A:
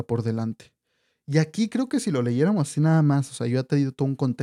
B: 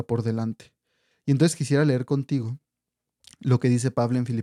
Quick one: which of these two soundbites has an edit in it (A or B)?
B